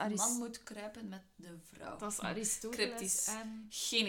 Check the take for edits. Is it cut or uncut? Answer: uncut